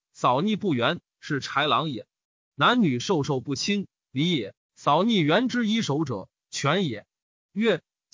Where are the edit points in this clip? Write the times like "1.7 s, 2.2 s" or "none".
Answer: none